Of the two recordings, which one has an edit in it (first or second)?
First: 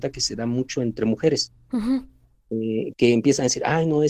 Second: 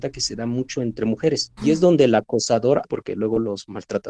second